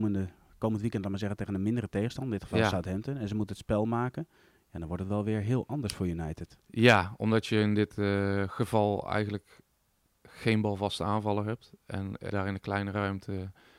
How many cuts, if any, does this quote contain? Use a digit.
1